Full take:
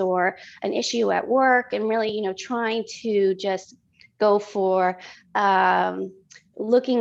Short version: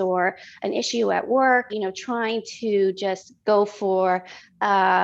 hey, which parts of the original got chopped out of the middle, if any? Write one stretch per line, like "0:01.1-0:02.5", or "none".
0:01.7-0:02.1
0:03.8-0:04.1